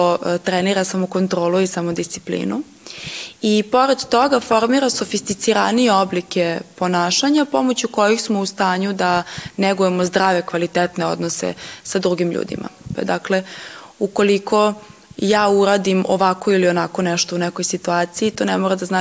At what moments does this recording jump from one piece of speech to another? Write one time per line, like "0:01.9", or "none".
0:12.9